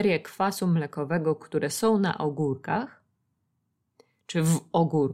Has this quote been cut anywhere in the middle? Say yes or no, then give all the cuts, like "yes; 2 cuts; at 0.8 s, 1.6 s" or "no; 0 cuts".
no; 0 cuts